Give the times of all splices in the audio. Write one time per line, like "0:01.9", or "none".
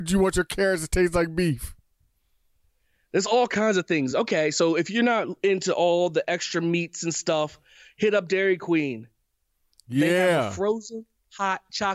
none